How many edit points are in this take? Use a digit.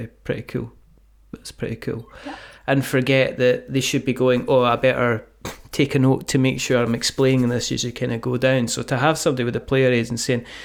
1